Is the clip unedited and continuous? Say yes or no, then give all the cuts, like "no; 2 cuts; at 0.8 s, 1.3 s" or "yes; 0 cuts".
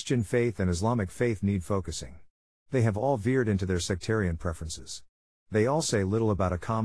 yes; 0 cuts